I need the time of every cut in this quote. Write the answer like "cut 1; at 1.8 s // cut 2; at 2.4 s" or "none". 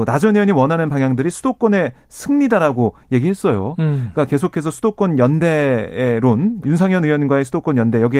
cut 1; at 6.6 s